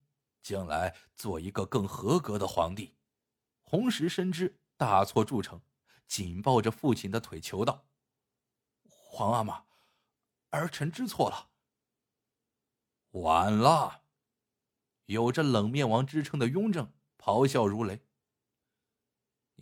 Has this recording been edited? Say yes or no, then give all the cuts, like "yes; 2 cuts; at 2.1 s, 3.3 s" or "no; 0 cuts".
yes; 1 cut; at 3.5 s